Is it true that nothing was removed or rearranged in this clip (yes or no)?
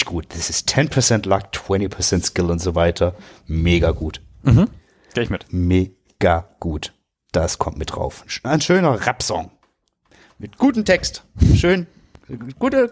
yes